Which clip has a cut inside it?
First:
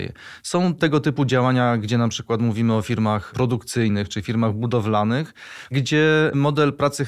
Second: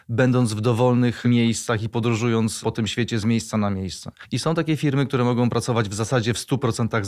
second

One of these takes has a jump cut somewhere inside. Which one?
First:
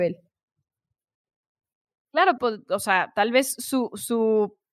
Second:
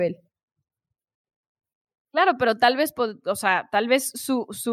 first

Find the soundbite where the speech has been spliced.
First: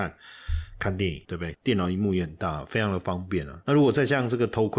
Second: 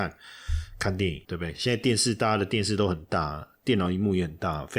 first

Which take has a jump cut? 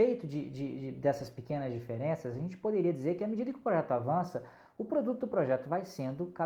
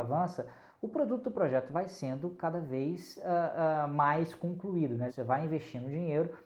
second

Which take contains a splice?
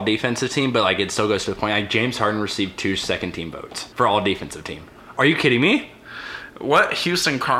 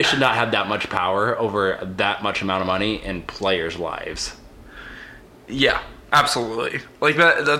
first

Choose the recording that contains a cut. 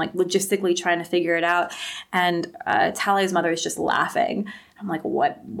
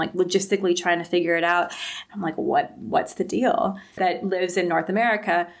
second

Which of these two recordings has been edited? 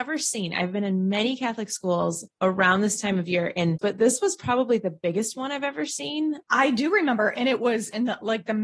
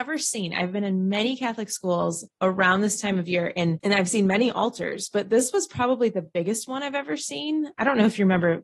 first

